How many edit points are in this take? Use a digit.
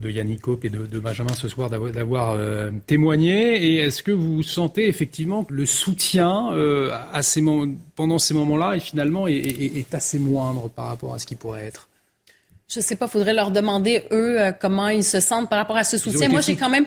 1